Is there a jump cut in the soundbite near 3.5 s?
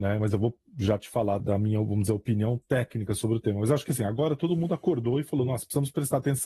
no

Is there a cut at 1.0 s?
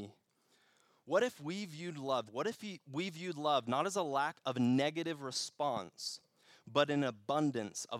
no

